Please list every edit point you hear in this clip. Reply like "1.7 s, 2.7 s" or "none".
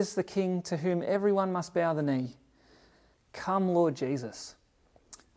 3.1 s